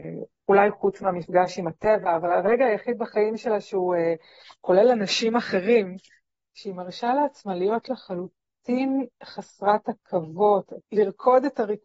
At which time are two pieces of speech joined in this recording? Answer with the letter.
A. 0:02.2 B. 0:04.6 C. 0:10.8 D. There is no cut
C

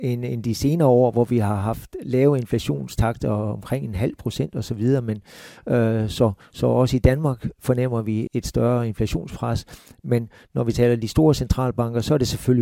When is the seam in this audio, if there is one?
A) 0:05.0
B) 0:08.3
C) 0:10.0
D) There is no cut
B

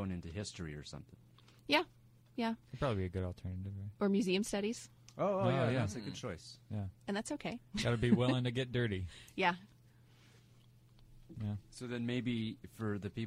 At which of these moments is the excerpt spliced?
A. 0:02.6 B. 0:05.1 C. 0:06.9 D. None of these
C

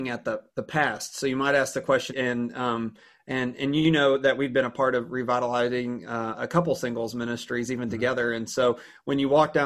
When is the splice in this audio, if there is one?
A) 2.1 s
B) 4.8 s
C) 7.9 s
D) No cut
A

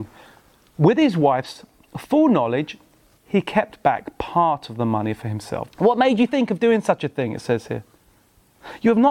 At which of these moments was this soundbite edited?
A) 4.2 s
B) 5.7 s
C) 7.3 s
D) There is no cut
B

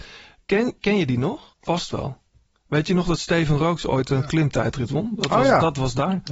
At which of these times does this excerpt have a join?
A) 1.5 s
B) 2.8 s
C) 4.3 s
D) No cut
A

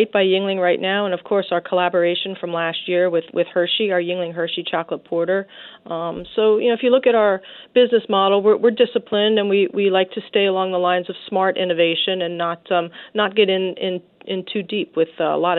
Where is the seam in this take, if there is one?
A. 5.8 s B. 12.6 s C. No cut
C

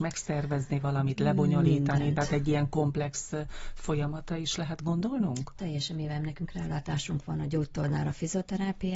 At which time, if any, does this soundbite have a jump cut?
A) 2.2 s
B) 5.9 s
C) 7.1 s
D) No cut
D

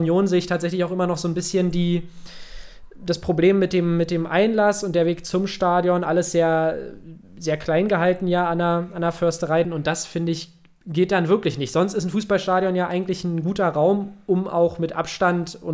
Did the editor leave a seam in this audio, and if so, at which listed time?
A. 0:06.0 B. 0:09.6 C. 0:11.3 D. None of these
B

